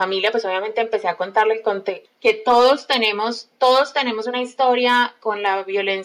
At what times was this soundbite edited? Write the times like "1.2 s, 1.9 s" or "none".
2.1 s